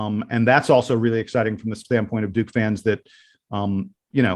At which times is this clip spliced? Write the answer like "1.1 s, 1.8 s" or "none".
none